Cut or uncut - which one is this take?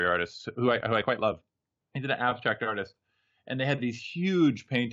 uncut